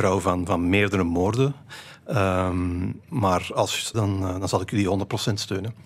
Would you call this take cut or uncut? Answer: cut